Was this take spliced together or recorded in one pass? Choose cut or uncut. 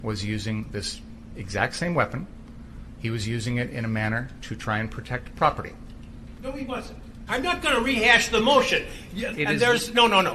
cut